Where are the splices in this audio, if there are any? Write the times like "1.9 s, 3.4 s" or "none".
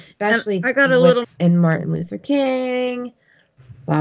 1.2 s